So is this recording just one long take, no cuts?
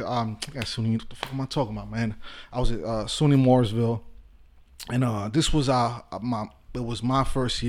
yes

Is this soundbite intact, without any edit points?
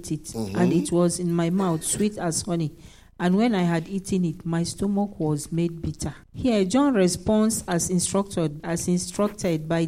no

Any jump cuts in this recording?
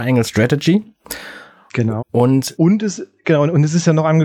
yes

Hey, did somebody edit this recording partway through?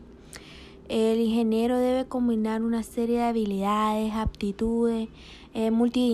no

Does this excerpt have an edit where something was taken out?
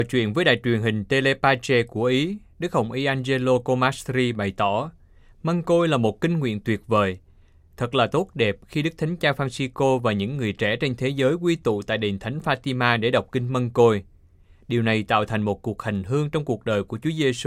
no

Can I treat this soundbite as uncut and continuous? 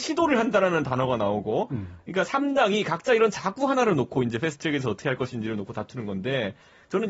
yes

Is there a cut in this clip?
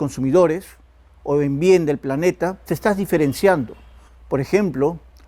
yes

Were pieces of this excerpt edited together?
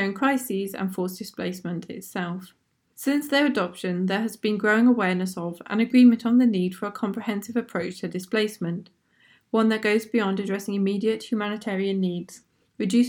yes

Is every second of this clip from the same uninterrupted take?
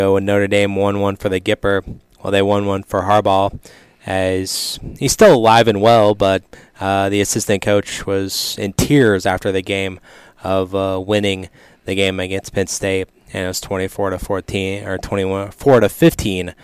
yes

